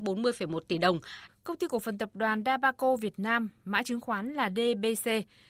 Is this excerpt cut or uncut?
cut